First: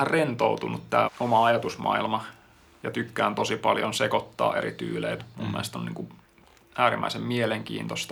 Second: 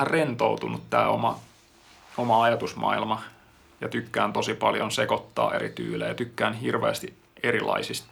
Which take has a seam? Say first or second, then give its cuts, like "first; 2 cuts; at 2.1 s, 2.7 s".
first; 2 cuts; at 1.0 s, 5.2 s